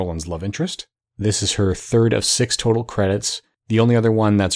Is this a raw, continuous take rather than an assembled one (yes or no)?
no